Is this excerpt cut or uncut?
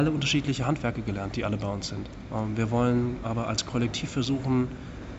uncut